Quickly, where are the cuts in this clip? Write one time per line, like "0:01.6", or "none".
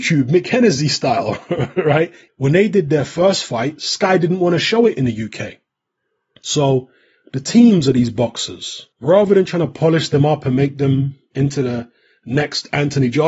0:02.3
0:06.4
0:08.9